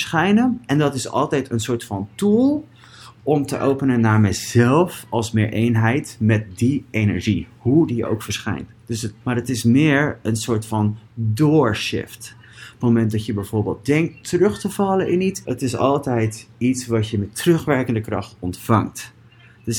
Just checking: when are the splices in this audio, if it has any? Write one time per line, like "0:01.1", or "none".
0:09.2
0:15.4

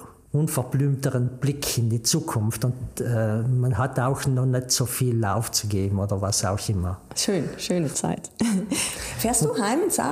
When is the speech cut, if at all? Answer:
none

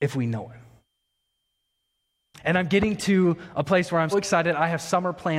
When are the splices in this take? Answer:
0:02.4
0:04.1

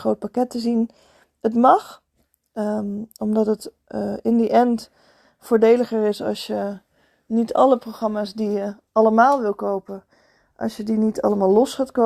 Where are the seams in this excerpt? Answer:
none

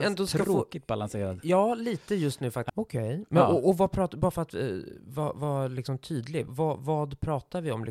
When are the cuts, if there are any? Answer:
0:02.7
0:06.5

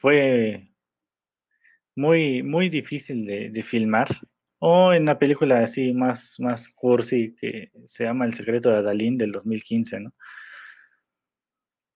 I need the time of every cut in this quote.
0:04.5

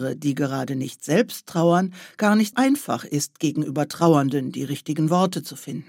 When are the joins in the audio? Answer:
0:02.5

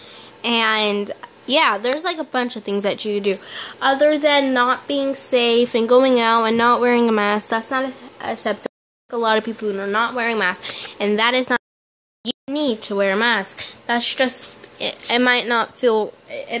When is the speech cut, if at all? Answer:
0:01.4

